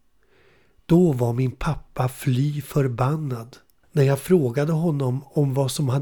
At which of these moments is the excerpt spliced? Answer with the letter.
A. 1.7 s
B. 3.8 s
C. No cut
B